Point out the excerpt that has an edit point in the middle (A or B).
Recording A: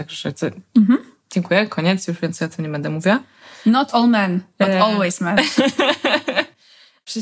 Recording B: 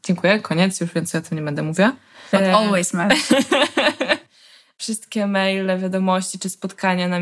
B